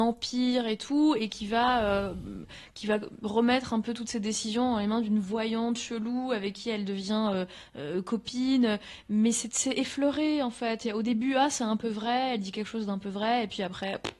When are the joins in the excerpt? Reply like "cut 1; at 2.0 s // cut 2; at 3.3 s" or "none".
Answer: none